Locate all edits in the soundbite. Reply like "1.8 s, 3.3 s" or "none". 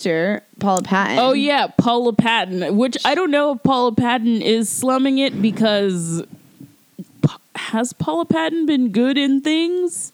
none

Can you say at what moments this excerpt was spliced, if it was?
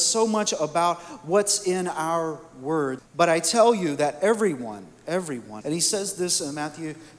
3.0 s, 5.6 s

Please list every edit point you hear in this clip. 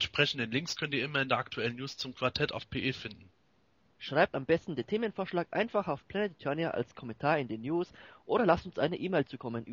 4.0 s

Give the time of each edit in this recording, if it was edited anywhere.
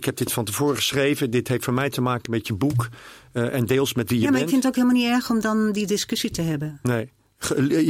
none

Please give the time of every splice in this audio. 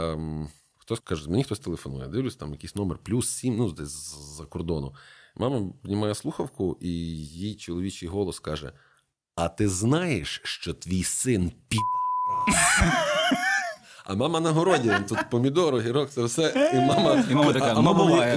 1.0 s

